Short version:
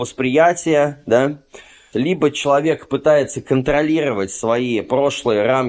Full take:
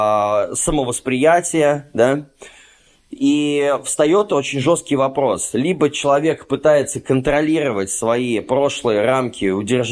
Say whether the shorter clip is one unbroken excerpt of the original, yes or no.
no